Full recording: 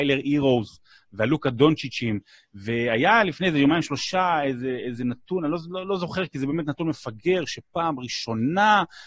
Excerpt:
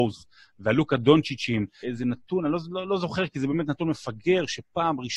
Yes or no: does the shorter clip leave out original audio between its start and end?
yes